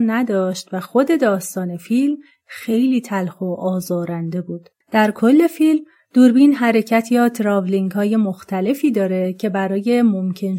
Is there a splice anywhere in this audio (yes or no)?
yes